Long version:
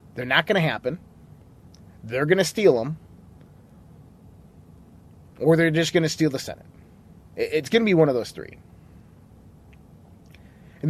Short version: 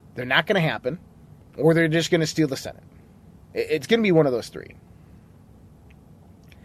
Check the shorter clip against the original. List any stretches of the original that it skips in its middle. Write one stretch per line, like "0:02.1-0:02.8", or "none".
0:01.5-0:05.3

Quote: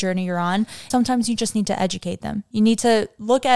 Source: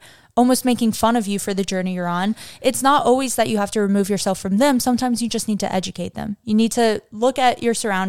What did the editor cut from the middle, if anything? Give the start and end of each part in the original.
0:02.6-0:04.8

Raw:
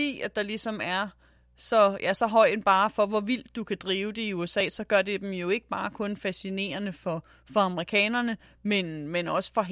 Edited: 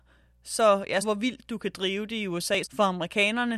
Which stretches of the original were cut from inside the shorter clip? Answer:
0:02.1-0:03.1
0:04.7-0:07.4

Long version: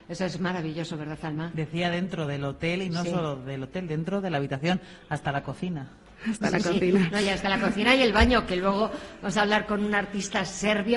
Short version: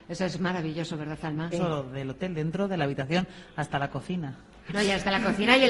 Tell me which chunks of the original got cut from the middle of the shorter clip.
0:01.5-0:03.0
0:06.2-0:07.1

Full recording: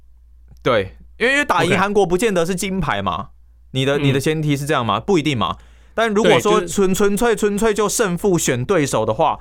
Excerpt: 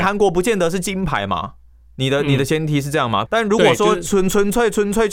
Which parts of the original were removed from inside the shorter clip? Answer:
0:05.0-0:05.9

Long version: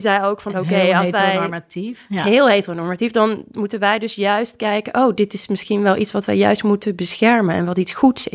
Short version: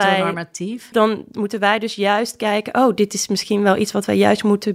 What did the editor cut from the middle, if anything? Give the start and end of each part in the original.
0:02.1-0:03.1

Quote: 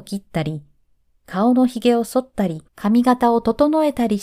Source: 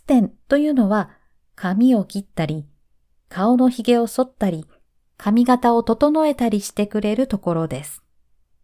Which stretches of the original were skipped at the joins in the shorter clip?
0:04.7-0:05.1

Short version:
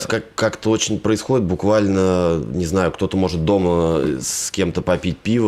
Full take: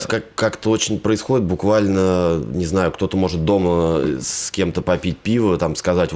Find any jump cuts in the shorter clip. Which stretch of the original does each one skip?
none

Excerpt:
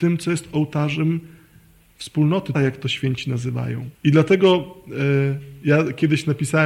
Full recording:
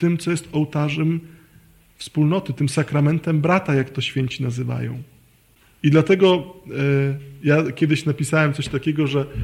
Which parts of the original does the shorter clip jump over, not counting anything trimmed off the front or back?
0:02.5-0:03.7
0:05.1-0:05.7

